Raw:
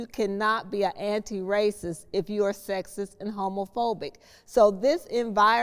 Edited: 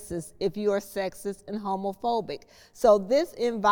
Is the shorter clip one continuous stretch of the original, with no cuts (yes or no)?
yes